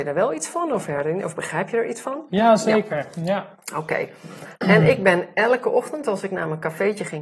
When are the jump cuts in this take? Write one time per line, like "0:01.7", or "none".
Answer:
none

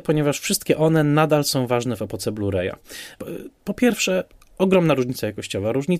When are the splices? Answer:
0:03.1

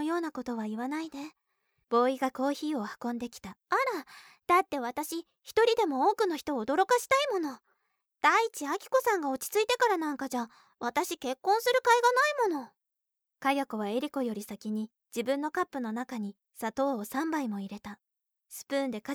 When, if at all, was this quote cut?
0:01.8
0:03.6

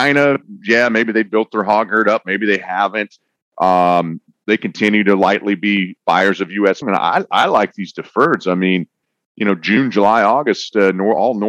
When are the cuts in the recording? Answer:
0:06.8

